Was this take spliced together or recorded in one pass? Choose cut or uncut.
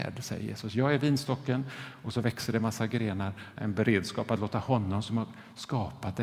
cut